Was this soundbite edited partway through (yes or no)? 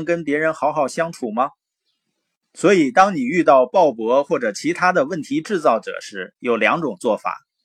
no